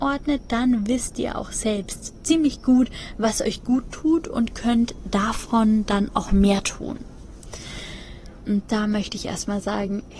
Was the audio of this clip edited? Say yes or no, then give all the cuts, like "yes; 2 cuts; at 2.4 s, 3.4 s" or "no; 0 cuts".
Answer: yes; 1 cut; at 8.4 s